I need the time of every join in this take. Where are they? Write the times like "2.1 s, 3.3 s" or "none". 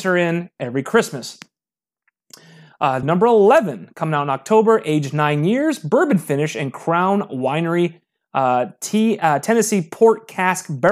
3.0 s